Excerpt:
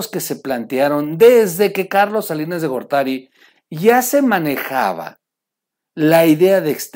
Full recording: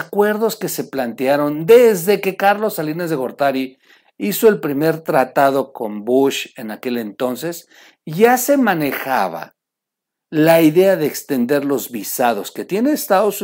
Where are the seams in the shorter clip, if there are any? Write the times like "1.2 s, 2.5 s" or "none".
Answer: 3.6 s